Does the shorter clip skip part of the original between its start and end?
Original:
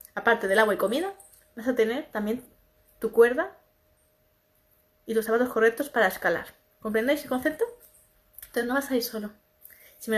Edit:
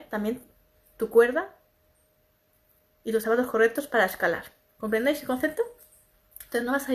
no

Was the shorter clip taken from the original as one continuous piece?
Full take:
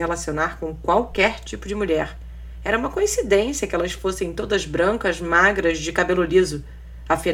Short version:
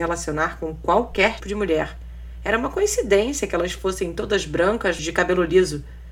no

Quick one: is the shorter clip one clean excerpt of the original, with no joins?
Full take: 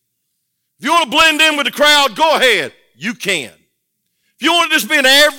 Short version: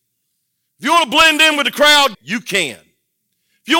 no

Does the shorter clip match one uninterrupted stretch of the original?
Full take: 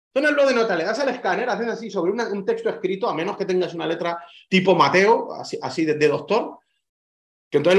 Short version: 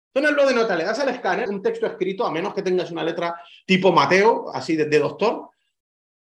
no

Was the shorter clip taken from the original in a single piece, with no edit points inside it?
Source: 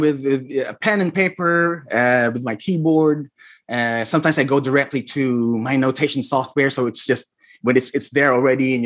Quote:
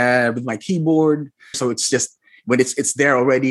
no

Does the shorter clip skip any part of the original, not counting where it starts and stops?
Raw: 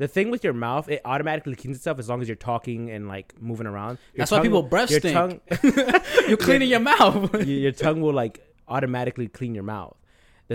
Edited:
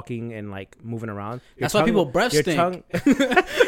no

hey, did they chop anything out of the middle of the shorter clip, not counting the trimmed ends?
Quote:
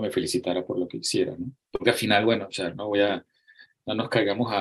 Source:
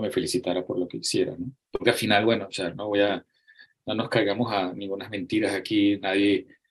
no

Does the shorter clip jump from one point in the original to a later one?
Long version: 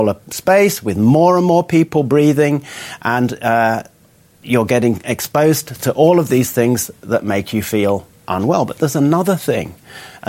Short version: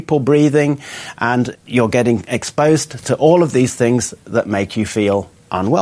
yes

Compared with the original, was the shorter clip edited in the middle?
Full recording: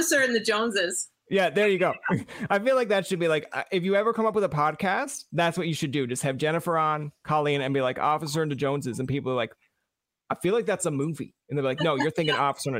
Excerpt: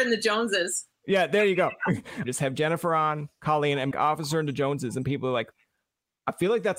yes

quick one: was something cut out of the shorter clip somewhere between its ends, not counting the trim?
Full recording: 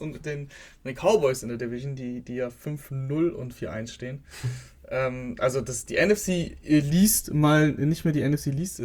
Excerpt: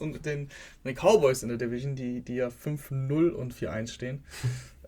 no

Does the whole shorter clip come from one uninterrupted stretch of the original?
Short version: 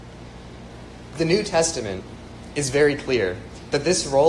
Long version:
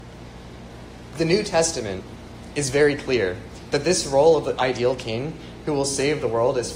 yes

